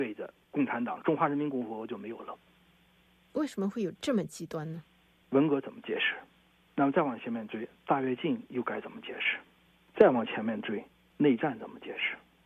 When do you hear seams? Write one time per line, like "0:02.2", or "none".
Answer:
0:05.1